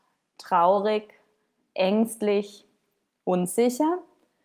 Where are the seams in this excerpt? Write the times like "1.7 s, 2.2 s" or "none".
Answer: none